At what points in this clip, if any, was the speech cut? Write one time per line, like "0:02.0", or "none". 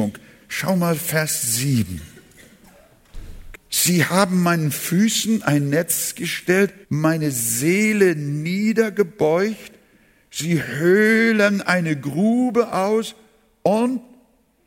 0:03.5
0:06.8

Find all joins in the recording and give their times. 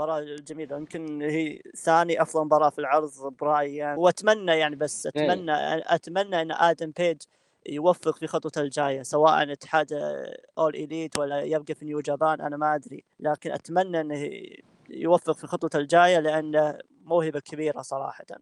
0:04.0
0:13.1

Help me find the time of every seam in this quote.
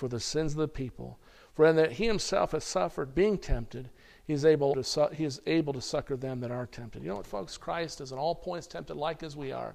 0:04.7

